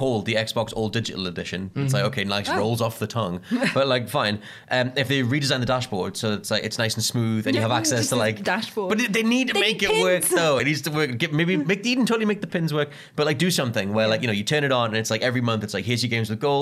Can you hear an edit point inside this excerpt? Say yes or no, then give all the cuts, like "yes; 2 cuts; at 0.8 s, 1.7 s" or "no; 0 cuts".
no; 0 cuts